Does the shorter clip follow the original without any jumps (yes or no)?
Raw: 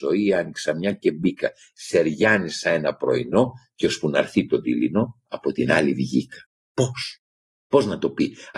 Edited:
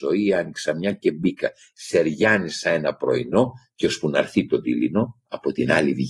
yes